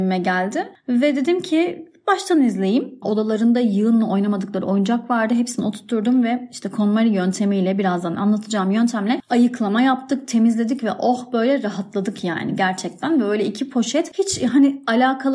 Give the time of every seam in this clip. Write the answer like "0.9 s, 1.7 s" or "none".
3.0 s